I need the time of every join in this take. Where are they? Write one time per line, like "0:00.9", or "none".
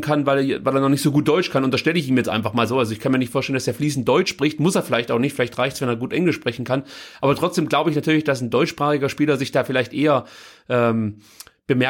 none